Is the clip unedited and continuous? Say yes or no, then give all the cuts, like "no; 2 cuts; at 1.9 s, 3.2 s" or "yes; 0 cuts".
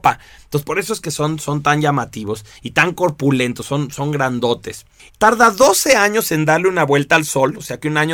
no; 1 cut; at 5.1 s